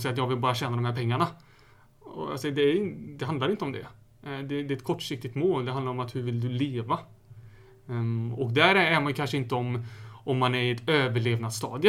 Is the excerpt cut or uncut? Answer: uncut